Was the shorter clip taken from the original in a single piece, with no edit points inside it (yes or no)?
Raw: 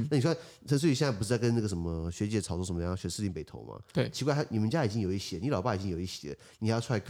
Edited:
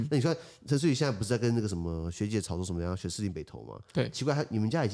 yes